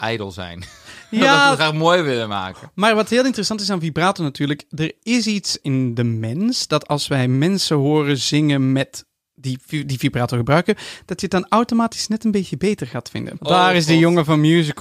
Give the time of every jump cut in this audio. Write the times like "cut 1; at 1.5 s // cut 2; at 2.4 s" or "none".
cut 1; at 5.6 s // cut 2; at 13.4 s